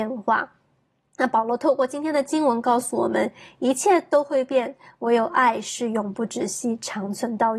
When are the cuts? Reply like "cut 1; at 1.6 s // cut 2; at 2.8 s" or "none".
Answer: none

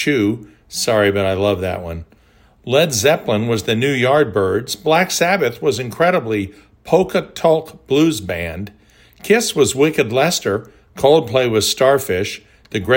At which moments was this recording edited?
none

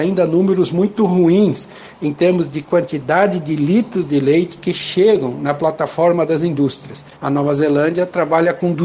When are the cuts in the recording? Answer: cut 1; at 7.2 s

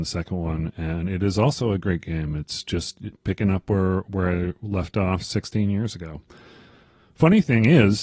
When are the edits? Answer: none

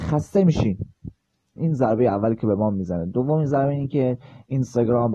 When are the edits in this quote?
cut 1; at 1.6 s

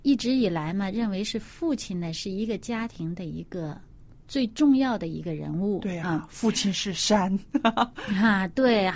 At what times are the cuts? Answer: none

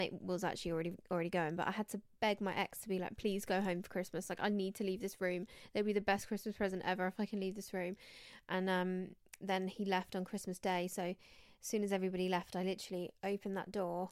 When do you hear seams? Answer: none

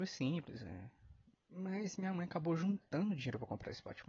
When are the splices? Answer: cut 1; at 1.3 s

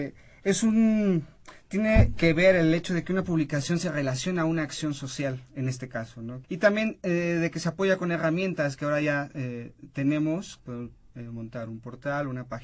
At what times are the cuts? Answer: cut 1; at 6.4 s // cut 2; at 10.6 s

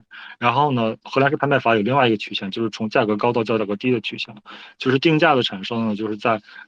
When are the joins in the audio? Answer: none

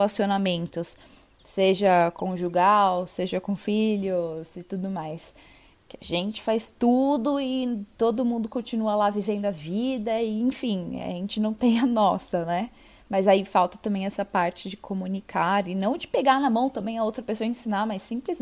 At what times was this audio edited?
none

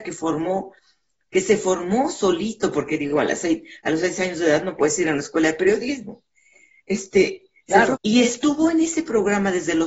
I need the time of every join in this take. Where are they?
cut 1; at 8.0 s

